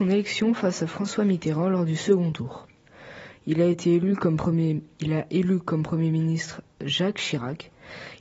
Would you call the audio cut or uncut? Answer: uncut